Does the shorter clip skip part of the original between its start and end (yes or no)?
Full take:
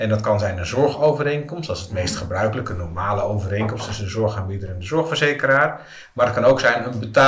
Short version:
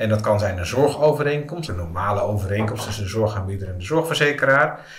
yes